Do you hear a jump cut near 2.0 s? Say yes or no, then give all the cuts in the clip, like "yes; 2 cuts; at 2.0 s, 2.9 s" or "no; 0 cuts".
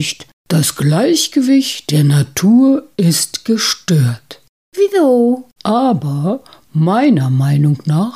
no; 1 cut; at 5.6 s